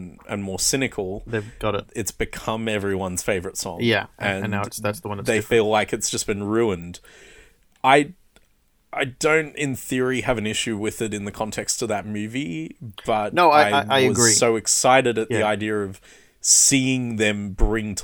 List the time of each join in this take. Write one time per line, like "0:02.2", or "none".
none